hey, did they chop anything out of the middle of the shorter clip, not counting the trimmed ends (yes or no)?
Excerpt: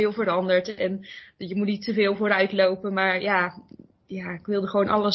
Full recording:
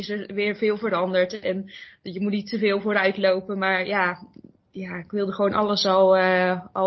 no